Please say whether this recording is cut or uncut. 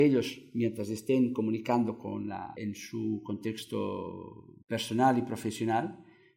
cut